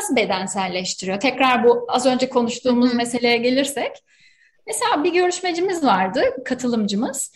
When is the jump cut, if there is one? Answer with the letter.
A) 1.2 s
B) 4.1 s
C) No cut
C